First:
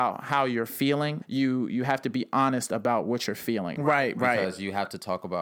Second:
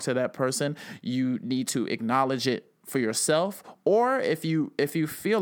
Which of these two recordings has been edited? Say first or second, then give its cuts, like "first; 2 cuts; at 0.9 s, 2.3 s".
first; 2 cuts; at 1.2 s, 3.8 s